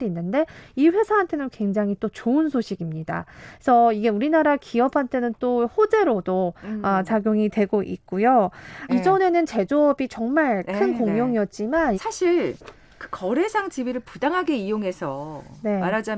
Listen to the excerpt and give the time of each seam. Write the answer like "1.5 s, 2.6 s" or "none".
8.9 s, 11.9 s